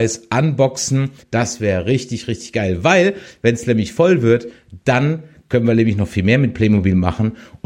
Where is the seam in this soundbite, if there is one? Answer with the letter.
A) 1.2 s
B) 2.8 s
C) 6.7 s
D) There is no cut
A